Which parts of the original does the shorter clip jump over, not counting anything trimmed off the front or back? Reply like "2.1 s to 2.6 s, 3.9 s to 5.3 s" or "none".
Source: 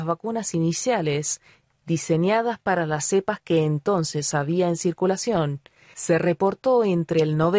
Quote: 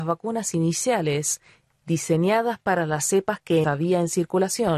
3.6 s to 4.3 s